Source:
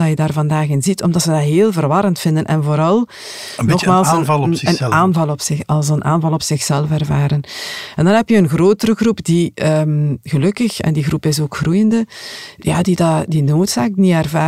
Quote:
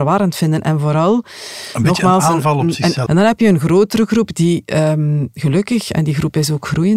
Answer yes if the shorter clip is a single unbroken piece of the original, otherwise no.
no